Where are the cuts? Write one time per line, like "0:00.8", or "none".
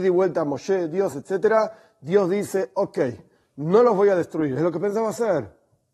none